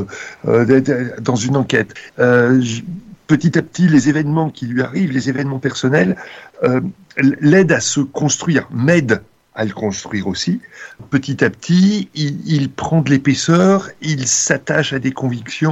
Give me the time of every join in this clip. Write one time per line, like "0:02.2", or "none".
0:02.1
0:11.0